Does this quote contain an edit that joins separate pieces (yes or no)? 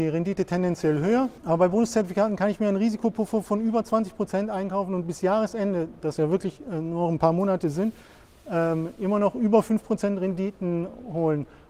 yes